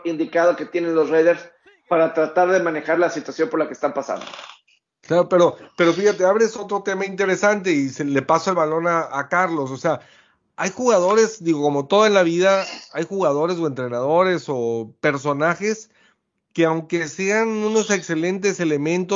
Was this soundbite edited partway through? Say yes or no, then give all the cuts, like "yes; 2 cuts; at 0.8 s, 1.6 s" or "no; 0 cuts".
no; 0 cuts